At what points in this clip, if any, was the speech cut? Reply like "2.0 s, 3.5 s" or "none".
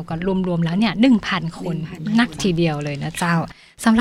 none